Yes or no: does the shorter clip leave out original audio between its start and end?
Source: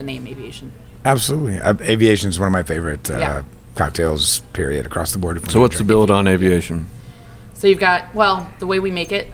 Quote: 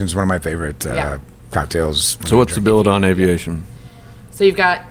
yes